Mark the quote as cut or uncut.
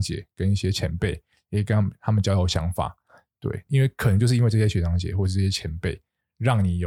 cut